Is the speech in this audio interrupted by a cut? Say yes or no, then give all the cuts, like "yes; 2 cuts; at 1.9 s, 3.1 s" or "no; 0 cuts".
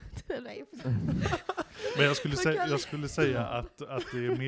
no; 0 cuts